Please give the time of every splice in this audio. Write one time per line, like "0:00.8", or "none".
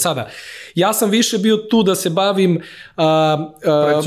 none